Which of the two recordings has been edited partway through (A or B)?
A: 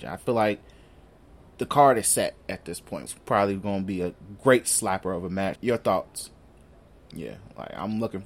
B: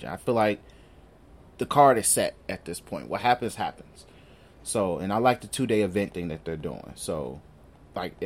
A